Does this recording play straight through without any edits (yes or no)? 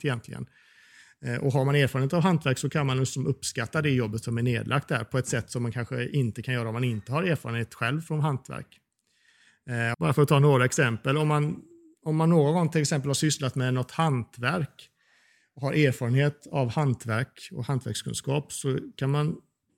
no